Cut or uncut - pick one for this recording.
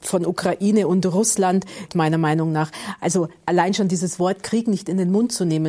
cut